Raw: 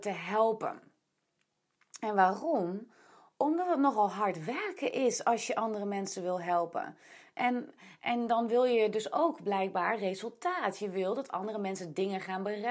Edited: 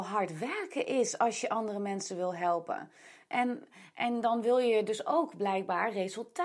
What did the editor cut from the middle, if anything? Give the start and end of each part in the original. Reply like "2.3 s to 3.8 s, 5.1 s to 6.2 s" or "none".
none